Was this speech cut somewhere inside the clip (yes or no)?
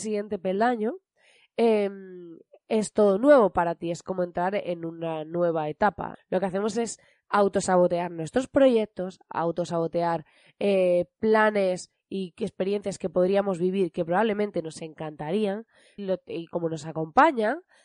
yes